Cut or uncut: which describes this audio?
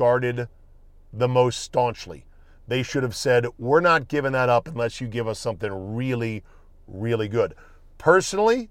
uncut